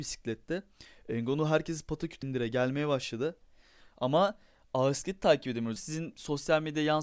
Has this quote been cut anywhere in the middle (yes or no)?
yes